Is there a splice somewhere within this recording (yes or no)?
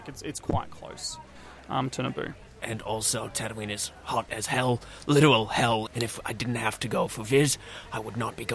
yes